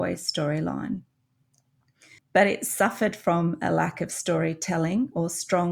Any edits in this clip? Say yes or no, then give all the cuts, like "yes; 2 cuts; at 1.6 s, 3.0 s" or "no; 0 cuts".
yes; 1 cut; at 2.2 s